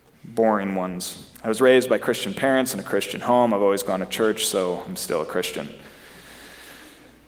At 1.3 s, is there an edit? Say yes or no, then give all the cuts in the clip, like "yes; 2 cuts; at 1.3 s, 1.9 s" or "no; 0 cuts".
yes; 1 cut; at 1.3 s